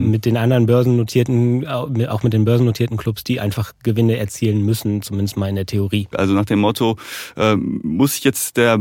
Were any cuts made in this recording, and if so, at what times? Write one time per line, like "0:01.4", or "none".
0:06.1